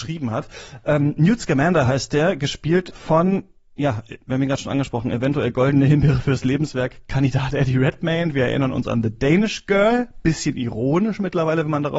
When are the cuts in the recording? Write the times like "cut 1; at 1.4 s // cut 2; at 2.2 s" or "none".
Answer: none